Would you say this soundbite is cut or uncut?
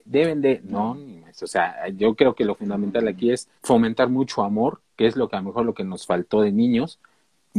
cut